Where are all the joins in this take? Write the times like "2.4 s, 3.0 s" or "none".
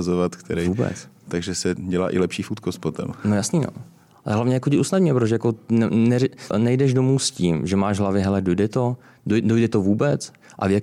6.5 s